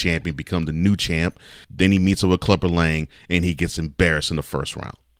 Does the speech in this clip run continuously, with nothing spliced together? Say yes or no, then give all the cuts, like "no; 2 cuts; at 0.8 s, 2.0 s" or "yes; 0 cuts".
no; 1 cut; at 1.6 s